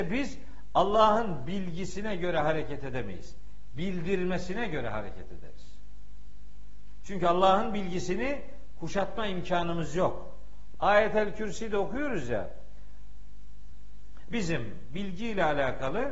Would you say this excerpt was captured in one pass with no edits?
no; 2 cuts; at 10.7 s, 14.3 s

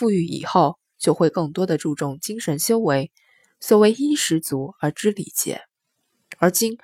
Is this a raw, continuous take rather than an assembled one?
yes; 0 cuts

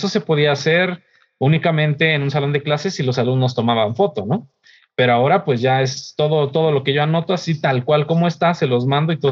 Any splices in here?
no; 0 cuts

